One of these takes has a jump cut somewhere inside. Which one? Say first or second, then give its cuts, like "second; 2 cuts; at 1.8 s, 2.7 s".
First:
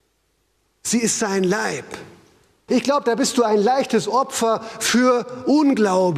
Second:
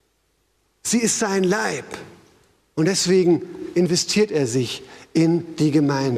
first; 1 cut; at 2.7 s